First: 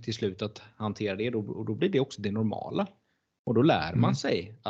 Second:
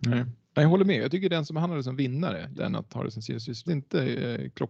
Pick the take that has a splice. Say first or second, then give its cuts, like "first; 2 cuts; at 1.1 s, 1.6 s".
second; 2 cuts; at 2.5 s, 3.7 s